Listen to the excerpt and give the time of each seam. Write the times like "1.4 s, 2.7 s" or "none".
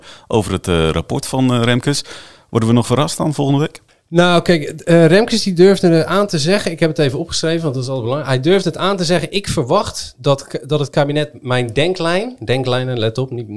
none